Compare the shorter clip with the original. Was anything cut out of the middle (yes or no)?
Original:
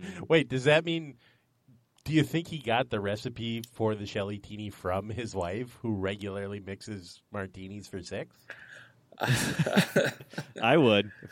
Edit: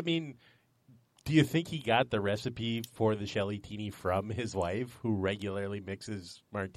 no